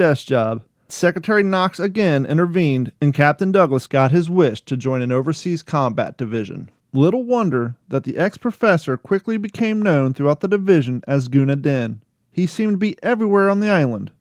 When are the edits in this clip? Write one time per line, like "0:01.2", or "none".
none